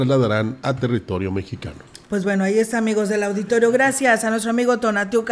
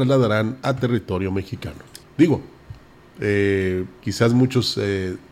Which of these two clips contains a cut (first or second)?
second